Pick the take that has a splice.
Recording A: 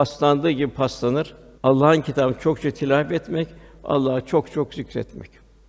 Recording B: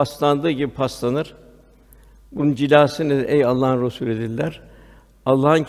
A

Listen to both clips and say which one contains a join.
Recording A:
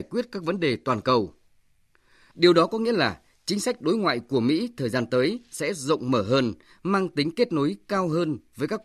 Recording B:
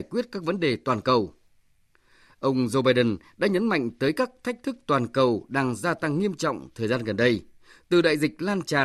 A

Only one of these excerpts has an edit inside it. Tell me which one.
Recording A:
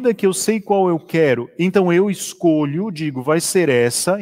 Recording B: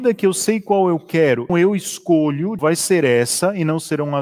B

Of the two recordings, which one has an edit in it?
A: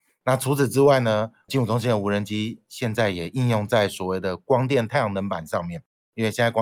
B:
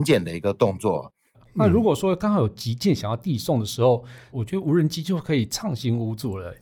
B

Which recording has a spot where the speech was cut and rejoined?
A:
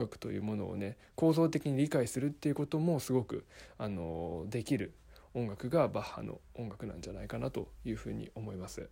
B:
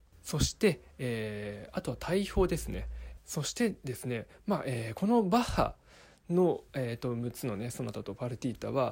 B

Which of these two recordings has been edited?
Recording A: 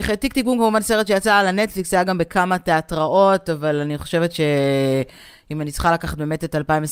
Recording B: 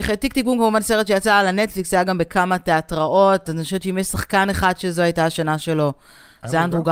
B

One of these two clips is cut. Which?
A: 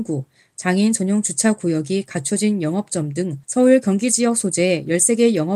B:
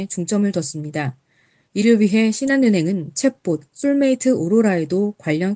A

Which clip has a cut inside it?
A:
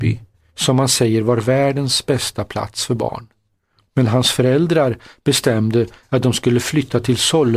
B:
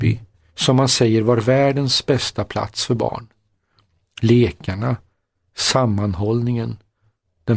A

